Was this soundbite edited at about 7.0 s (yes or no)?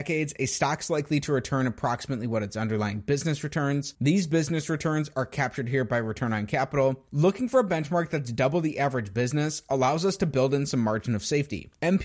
no